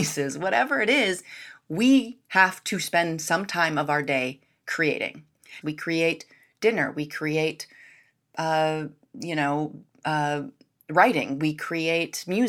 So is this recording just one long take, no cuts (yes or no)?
no